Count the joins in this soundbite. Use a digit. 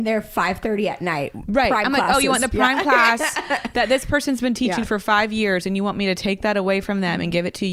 0